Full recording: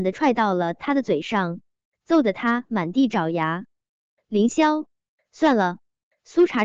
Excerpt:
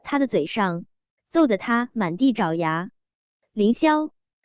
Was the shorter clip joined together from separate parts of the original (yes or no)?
no